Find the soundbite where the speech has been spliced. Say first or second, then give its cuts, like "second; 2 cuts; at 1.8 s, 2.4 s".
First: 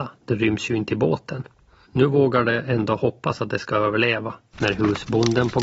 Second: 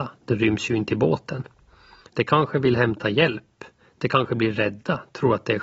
first; 2 cuts; at 1.8 s, 4.5 s